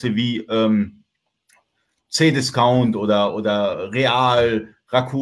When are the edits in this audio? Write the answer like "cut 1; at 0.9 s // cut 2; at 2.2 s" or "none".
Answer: none